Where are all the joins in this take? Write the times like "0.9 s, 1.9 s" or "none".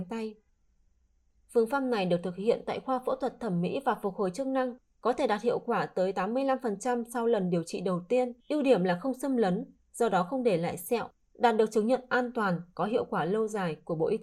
8.4 s